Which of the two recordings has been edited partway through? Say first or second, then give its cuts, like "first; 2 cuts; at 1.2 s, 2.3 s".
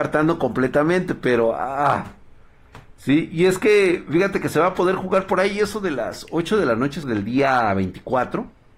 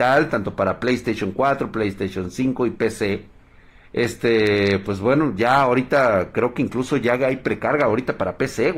first; 1 cut; at 7.0 s